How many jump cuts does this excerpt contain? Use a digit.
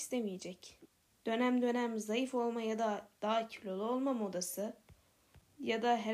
1